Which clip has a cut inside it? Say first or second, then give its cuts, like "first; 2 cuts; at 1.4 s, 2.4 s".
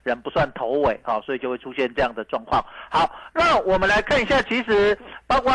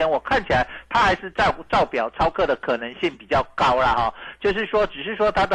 second; 1 cut; at 1.3 s